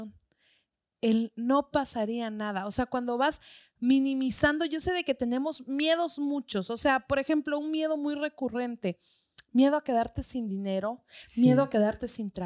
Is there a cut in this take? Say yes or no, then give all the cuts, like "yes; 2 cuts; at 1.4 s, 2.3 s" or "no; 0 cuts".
no; 0 cuts